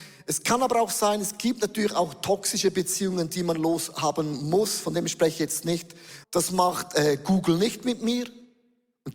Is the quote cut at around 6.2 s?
yes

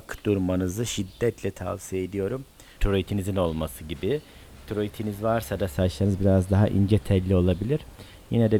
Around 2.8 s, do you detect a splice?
yes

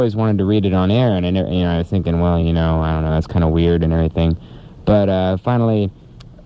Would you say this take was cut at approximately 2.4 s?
no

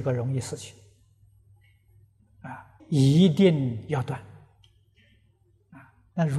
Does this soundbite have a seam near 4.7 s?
no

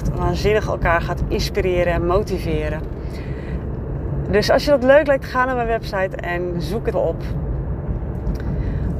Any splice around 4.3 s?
no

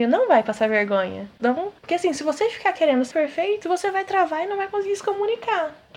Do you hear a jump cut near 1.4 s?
yes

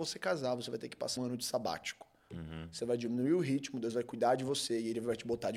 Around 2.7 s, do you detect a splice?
no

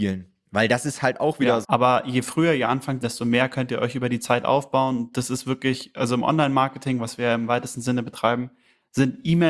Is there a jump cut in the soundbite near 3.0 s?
yes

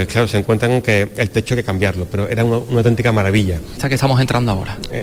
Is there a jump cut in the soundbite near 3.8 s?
yes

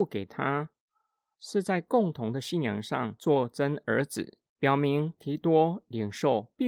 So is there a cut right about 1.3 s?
yes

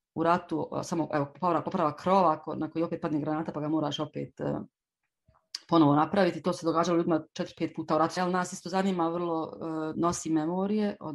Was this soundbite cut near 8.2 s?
yes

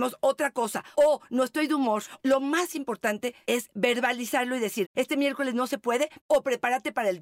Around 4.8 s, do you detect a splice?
yes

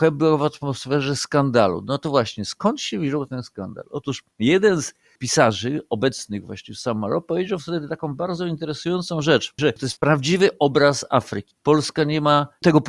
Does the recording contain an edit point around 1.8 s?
no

